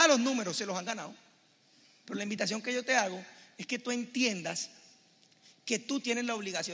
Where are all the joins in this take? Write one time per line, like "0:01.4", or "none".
0:02.0